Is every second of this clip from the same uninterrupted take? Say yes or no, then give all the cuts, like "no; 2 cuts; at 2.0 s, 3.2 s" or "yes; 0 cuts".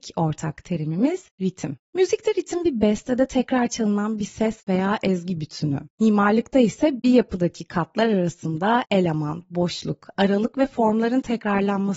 yes; 0 cuts